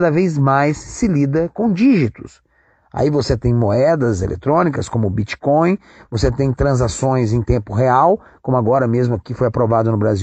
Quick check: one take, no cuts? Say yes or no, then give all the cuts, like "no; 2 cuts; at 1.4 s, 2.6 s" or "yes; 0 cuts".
yes; 0 cuts